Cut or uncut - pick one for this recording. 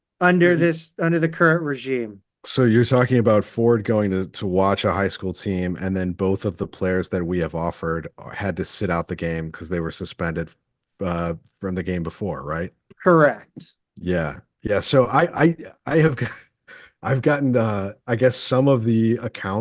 uncut